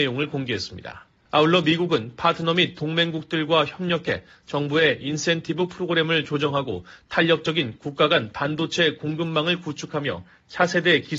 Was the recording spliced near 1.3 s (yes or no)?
yes